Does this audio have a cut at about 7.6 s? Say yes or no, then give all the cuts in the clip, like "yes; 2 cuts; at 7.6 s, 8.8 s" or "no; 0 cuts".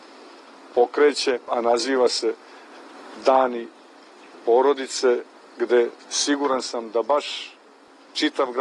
no; 1 cut; at 1.5 s